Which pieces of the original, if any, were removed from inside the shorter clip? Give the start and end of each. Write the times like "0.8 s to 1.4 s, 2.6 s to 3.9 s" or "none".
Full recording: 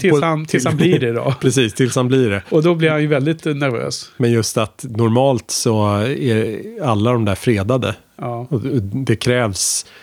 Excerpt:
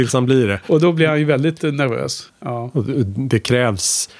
4.1 s to 8.1 s

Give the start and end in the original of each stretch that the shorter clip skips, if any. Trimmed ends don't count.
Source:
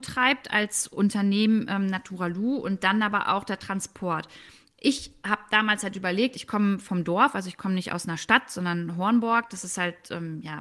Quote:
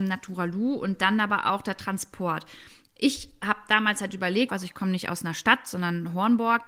6.3 s to 7.3 s

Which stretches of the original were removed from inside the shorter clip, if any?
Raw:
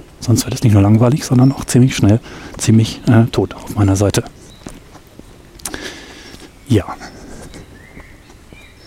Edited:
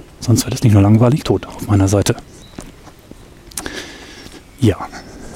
1.2 s to 3.3 s

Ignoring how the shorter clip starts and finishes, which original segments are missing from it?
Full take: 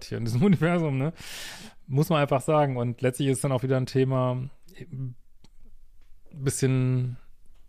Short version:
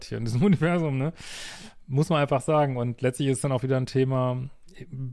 none

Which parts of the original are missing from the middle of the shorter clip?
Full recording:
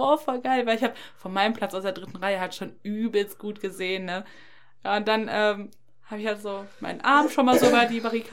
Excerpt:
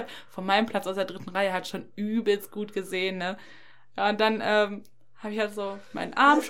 none

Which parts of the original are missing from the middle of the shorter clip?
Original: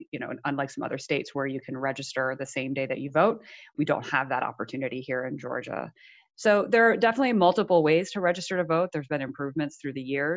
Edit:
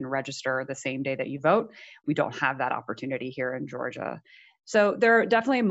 none

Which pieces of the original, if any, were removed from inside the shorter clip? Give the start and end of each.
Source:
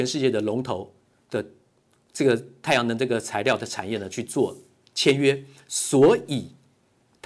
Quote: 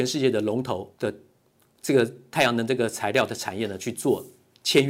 0.9 s to 1.2 s

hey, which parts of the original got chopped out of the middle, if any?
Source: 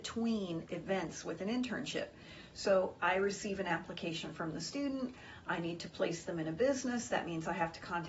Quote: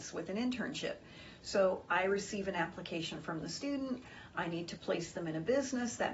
none

